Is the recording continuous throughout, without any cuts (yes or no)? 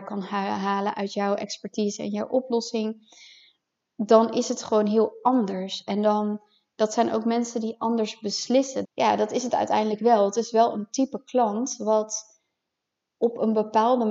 no